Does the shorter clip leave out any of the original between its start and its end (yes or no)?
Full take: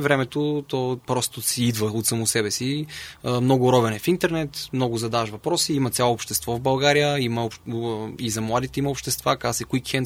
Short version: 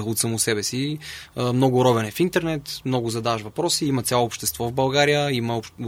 no